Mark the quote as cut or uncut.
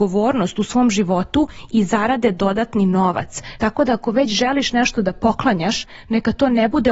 cut